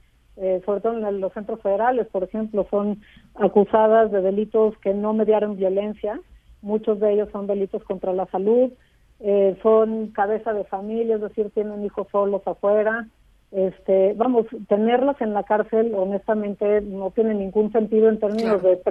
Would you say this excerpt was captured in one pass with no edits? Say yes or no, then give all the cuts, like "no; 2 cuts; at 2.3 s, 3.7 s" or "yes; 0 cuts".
yes; 0 cuts